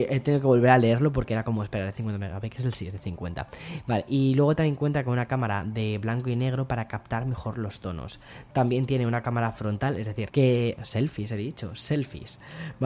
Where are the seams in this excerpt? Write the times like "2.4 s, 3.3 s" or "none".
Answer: 10.3 s